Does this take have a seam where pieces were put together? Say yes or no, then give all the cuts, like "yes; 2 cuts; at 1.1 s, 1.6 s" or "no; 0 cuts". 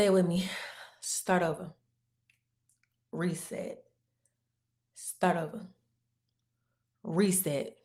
no; 0 cuts